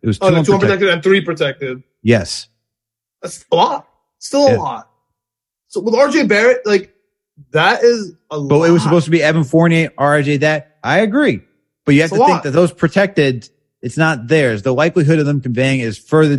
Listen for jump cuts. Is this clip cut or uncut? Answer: uncut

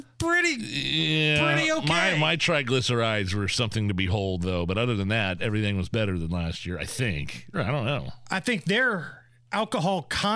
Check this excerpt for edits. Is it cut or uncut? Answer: cut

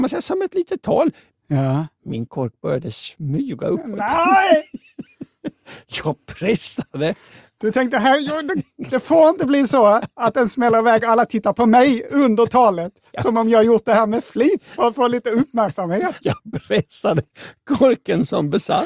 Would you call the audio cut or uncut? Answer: cut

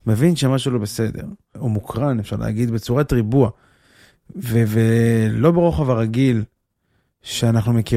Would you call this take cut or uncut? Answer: cut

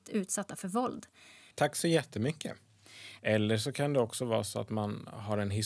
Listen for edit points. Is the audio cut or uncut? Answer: cut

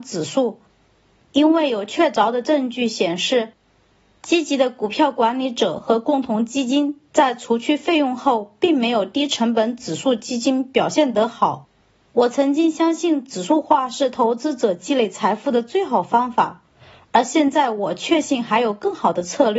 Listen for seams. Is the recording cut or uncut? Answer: uncut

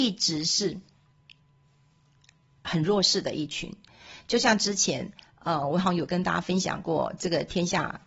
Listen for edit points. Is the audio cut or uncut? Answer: uncut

